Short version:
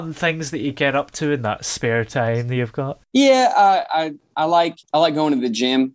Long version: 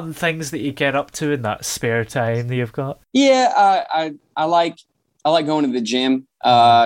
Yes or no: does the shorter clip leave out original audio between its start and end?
yes